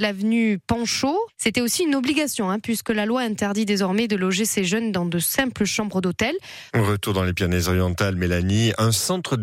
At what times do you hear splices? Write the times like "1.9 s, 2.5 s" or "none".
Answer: 1.3 s, 6.7 s